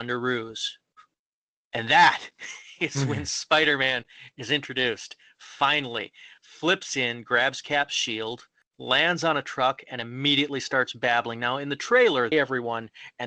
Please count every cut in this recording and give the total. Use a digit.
1